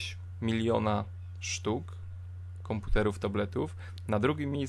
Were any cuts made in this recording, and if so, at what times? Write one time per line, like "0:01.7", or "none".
none